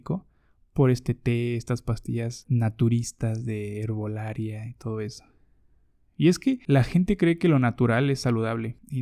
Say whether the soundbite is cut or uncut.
uncut